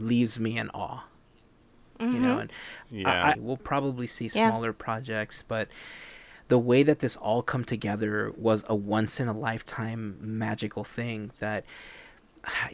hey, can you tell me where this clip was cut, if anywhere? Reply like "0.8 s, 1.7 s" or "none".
3.3 s